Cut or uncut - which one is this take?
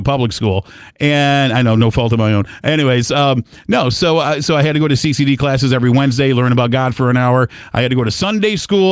uncut